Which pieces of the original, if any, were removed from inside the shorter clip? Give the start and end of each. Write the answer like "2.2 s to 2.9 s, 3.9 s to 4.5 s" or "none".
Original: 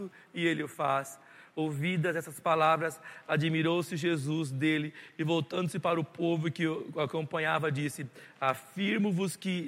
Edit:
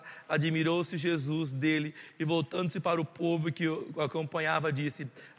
none